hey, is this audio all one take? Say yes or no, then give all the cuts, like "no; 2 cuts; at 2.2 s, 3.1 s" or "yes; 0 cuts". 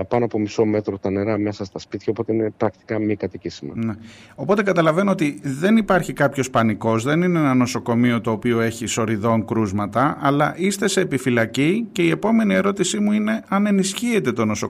yes; 0 cuts